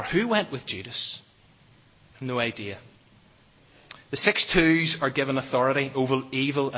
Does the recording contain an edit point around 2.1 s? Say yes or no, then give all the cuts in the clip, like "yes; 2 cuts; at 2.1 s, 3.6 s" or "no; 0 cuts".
yes; 1 cut; at 2.1 s